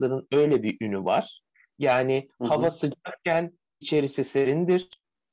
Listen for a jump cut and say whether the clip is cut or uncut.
uncut